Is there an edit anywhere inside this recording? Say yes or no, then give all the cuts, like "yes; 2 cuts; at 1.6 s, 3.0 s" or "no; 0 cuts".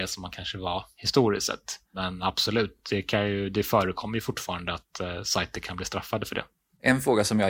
no; 0 cuts